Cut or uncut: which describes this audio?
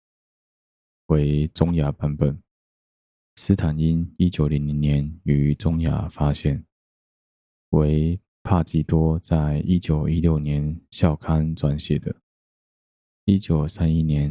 cut